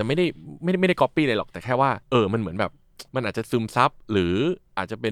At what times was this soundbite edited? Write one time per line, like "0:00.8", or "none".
0:02.0
0:03.1